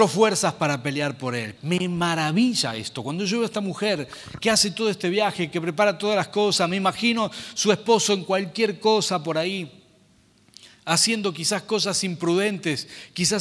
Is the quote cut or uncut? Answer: cut